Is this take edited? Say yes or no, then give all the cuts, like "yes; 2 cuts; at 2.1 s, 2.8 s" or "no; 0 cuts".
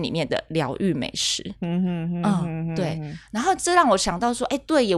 no; 0 cuts